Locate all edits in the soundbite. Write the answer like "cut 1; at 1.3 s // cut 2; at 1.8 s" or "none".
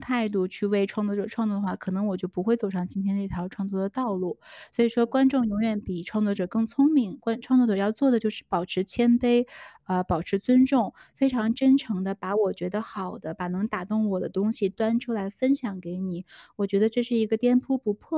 none